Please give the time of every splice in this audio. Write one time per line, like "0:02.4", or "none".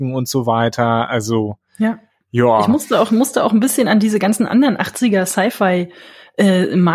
none